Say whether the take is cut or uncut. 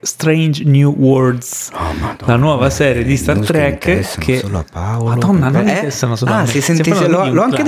uncut